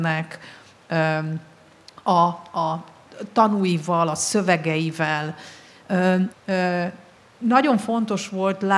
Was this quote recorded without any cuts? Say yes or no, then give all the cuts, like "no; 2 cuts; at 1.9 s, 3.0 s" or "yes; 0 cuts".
no; 1 cut; at 6.3 s